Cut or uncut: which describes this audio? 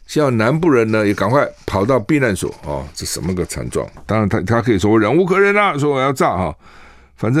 cut